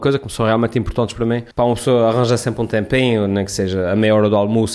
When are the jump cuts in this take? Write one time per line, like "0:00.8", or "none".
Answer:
0:01.5